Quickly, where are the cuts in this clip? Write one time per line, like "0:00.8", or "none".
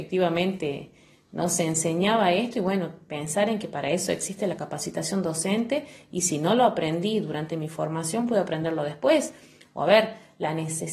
none